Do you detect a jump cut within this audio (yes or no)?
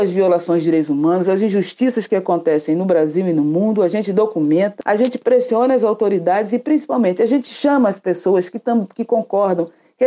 yes